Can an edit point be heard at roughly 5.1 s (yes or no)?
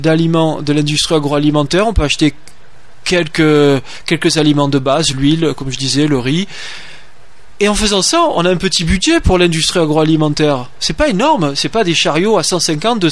no